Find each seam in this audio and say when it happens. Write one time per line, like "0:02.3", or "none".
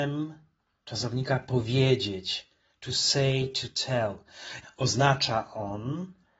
0:04.6